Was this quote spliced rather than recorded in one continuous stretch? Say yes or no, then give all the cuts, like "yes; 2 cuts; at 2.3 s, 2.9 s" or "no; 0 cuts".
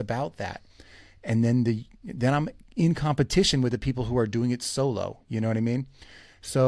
no; 0 cuts